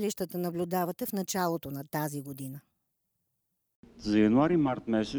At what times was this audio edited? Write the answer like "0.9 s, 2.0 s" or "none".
none